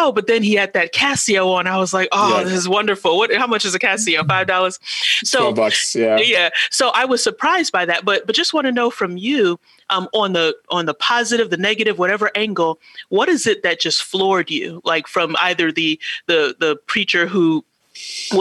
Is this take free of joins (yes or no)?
yes